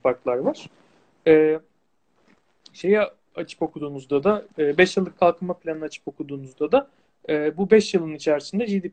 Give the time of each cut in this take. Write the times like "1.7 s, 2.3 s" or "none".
none